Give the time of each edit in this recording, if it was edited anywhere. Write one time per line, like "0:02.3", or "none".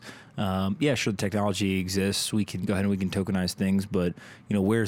none